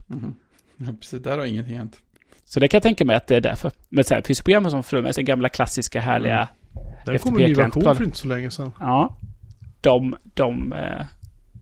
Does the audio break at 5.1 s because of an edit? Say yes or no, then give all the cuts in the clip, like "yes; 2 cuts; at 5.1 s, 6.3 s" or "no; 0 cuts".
yes; 2 cuts; at 2.4 s, 5.1 s